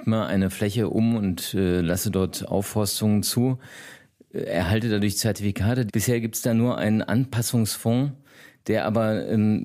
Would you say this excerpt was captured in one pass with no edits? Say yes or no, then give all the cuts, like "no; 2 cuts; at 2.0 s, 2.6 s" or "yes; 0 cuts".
no; 1 cut; at 5.9 s